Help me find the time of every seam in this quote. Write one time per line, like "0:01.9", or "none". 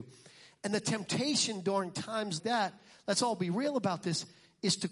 0:02.4